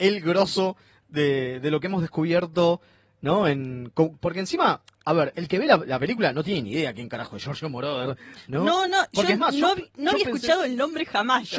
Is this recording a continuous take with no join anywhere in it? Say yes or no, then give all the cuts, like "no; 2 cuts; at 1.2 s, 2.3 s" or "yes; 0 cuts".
yes; 0 cuts